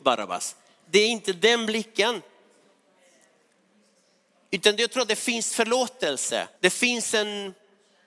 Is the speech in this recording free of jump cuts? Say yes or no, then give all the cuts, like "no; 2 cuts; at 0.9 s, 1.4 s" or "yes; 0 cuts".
no; 1 cut; at 6.5 s